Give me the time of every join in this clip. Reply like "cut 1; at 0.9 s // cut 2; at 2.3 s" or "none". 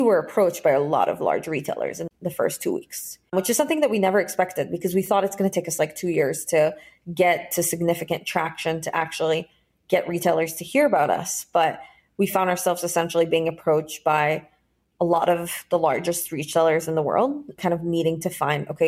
none